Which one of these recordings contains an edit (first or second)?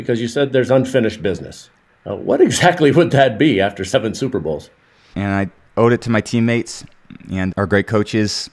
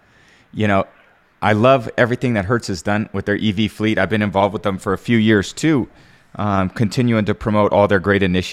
first